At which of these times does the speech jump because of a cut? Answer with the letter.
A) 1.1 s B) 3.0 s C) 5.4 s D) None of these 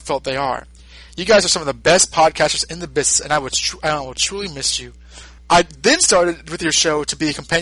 C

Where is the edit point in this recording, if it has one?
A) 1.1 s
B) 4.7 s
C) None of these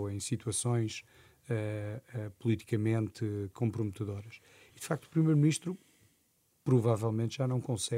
C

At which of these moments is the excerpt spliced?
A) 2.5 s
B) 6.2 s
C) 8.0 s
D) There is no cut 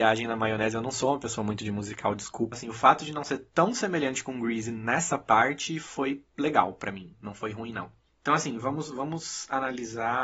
A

